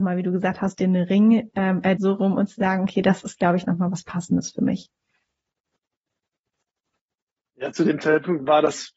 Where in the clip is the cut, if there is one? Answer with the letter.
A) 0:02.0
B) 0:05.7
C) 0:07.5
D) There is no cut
A